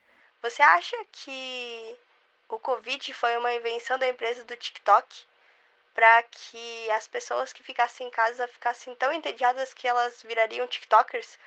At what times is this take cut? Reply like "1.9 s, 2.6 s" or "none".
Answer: none